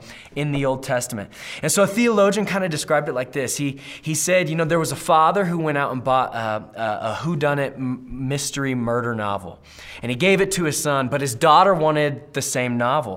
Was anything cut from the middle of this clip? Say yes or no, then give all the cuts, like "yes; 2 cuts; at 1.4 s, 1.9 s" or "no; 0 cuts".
no; 0 cuts